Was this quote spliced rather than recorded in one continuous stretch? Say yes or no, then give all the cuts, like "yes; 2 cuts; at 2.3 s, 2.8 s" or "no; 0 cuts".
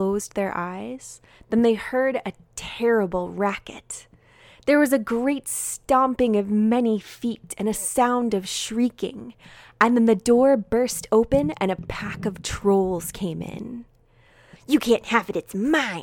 yes; 1 cut; at 14.5 s